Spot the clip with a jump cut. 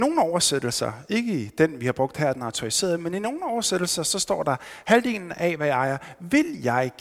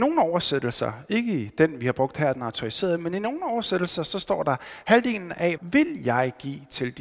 second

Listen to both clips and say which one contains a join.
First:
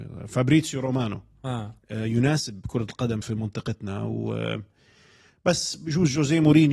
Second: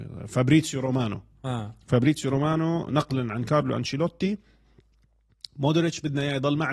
first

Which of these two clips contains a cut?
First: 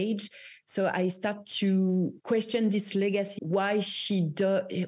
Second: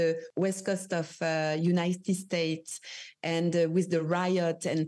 first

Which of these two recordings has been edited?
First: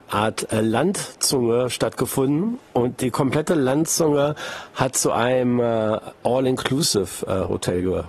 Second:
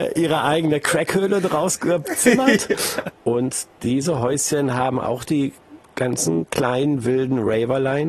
second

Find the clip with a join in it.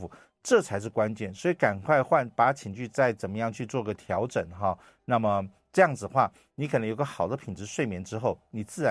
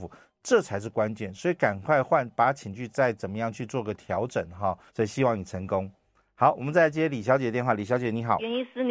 second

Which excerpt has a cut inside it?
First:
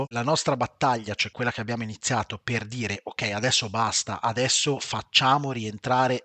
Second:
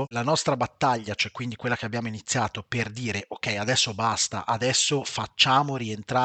first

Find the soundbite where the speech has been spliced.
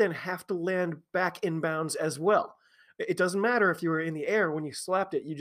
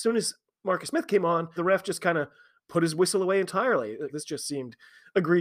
second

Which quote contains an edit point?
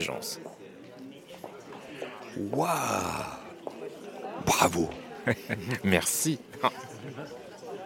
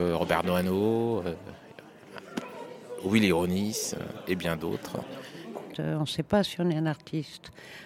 second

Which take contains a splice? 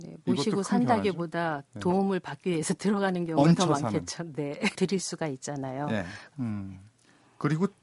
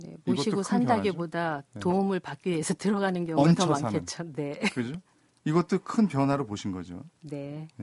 first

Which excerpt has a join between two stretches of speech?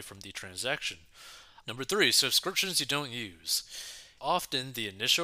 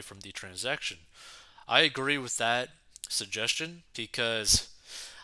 first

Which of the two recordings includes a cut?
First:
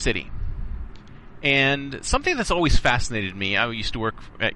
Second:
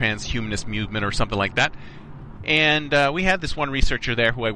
second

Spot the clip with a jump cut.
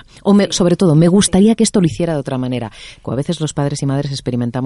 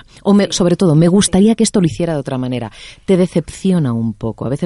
first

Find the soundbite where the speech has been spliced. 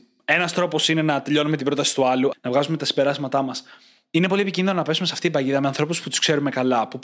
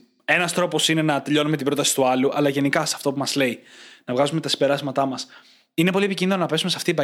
first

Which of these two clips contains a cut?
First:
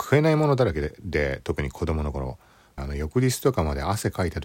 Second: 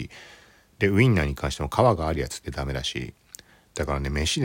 first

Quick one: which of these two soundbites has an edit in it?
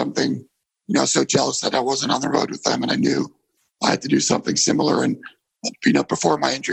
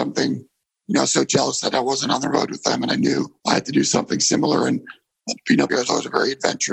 second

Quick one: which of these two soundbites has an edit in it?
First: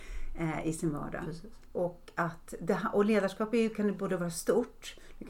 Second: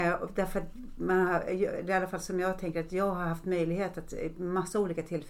first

